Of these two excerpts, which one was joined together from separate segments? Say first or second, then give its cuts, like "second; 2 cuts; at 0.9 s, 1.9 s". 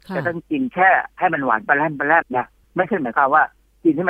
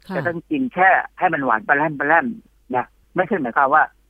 first; 1 cut; at 2.2 s